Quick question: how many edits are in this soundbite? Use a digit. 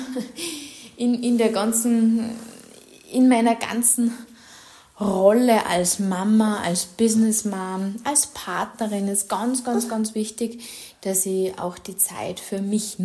0